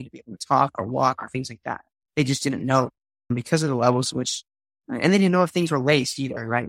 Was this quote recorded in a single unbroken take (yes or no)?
yes